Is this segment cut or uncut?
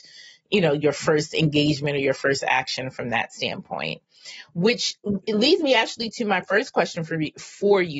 uncut